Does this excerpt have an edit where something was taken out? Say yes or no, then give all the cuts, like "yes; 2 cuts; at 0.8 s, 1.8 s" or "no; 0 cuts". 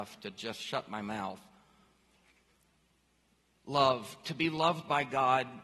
no; 0 cuts